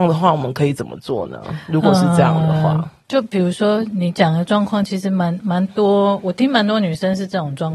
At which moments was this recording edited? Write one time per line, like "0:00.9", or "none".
none

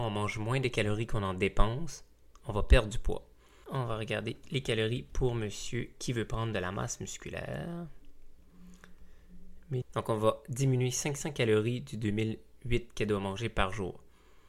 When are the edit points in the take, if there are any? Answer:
0:03.6
0:09.8

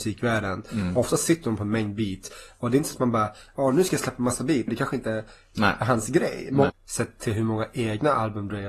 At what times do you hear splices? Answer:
0:04.7
0:06.7

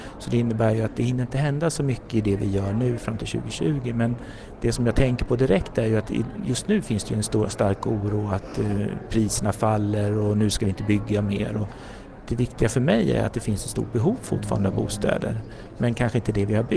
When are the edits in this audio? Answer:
none

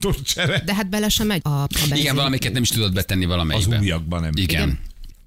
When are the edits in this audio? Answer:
0:01.4

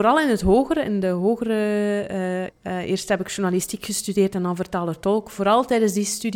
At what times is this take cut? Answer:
0:02.5

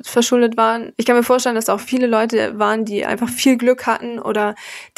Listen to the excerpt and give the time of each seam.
0:00.9

